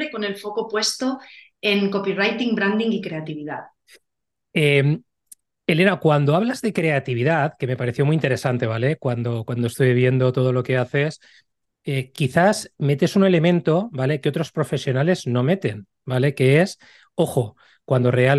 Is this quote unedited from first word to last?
yes; 0 cuts

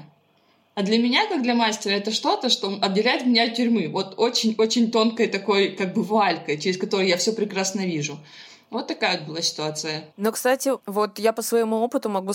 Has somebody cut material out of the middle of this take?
yes; 1 cut; at 10.1 s

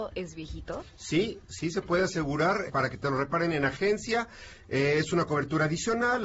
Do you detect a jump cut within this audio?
yes; 1 cut; at 2.7 s

